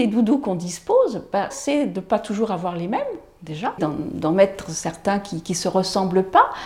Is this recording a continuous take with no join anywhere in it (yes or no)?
no